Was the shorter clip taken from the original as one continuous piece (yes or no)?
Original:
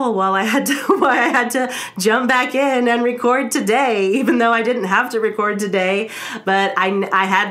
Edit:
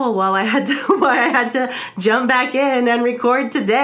yes